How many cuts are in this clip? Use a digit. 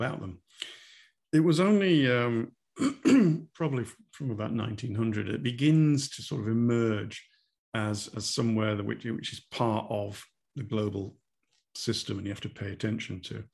1